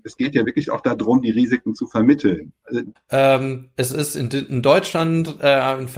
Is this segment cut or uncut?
cut